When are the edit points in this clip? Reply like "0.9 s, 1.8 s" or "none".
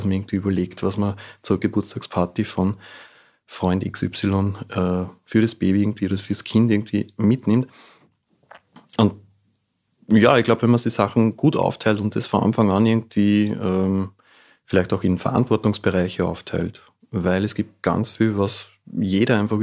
none

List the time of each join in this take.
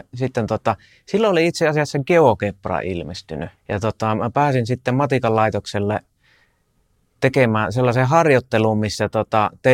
3.6 s

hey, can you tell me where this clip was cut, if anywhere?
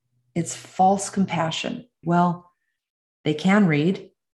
2.0 s

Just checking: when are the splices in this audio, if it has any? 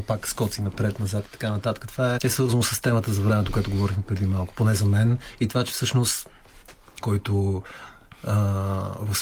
2.2 s, 7.0 s

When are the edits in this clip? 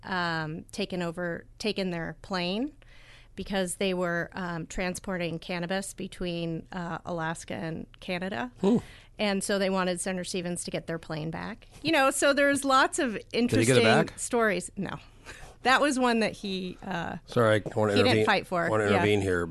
none

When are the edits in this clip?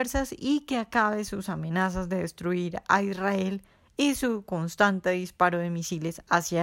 none

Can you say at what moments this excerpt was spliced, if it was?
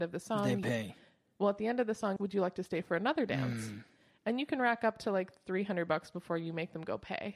2.2 s

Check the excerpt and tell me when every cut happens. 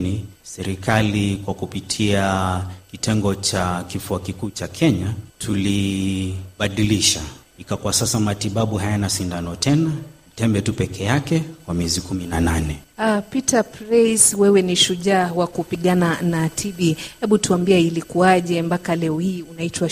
12.9 s

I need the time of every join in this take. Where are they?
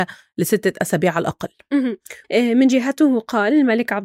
2.2 s

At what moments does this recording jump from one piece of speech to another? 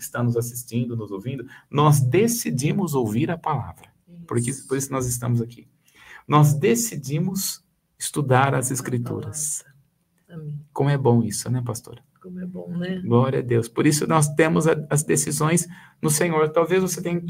10.2 s

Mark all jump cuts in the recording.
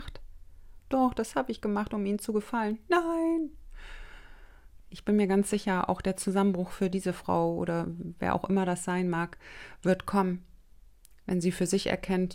4.8 s

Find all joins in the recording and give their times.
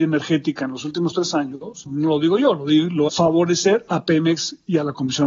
1.9 s, 3.1 s

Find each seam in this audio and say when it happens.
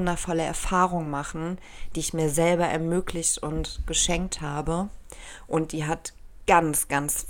none

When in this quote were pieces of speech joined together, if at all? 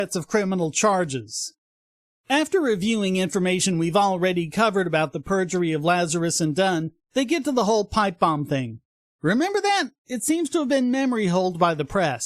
none

